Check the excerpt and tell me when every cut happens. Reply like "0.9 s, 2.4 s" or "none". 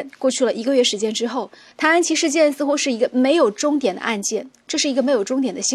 1.7 s